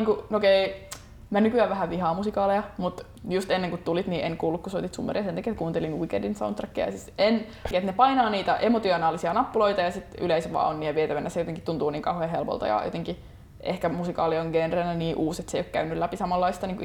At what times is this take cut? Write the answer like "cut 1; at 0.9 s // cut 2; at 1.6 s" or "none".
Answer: cut 1; at 7.7 s